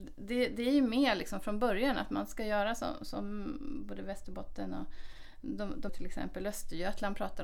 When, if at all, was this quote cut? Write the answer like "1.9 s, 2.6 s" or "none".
5.9 s

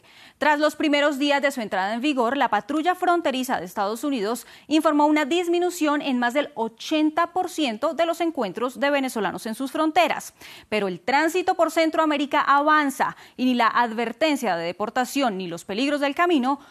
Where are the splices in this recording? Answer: none

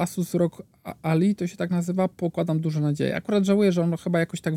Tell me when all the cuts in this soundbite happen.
none

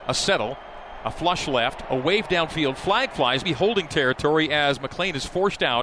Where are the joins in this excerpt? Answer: 3.4 s

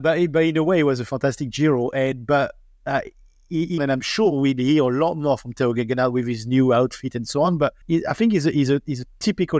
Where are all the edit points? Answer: 3.8 s, 7.8 s

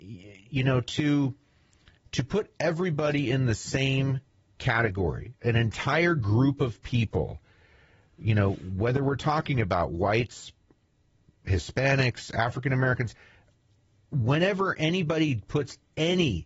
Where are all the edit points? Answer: none

